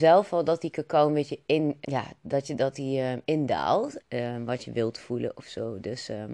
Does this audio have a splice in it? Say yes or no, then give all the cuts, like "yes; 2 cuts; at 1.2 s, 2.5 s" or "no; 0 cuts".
yes; 2 cuts; at 1.8 s, 4.0 s